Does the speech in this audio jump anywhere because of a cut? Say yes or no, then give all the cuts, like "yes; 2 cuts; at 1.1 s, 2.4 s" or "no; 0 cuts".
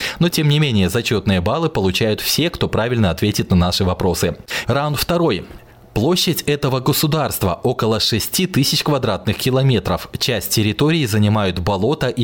yes; 1 cut; at 4.6 s